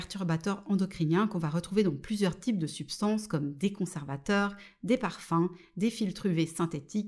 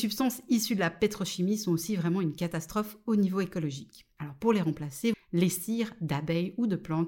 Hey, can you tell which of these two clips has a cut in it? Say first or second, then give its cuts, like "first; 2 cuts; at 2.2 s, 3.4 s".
second; 1 cut; at 5.1 s